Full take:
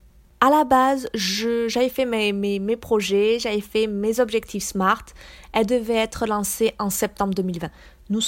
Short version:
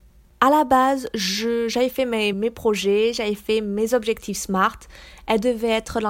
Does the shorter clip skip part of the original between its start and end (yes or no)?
yes